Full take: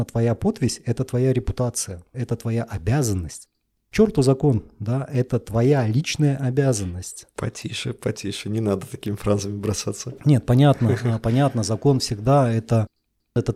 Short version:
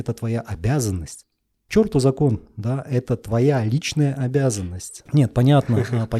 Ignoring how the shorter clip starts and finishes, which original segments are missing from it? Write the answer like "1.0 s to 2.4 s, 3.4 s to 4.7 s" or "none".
7.3 s to 10.2 s